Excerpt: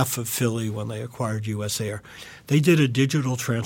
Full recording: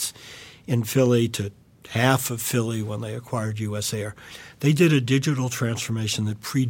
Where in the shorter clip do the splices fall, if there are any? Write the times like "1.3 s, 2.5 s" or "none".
none